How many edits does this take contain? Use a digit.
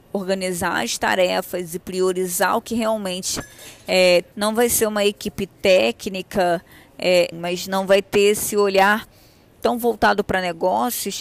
2